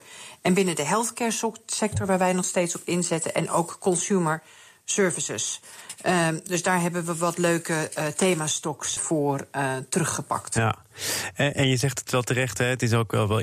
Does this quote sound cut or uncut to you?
cut